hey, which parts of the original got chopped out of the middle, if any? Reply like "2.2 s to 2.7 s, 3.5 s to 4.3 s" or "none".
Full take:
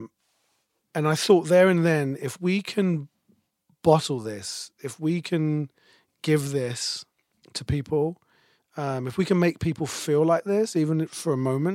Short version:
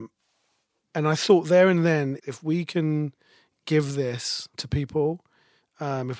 2.2 s to 4.7 s, 7.1 s to 7.5 s